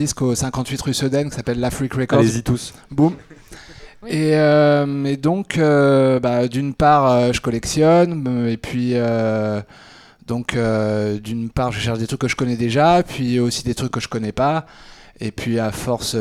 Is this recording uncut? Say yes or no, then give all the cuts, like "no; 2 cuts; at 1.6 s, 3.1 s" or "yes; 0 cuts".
yes; 0 cuts